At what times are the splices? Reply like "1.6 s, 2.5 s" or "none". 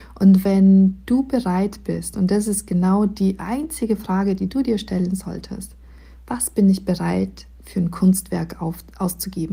none